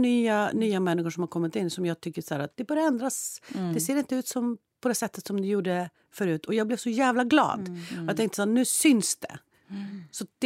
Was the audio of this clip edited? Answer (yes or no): no